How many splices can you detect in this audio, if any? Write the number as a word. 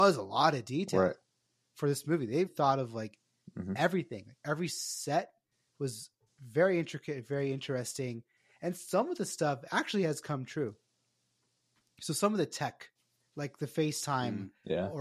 one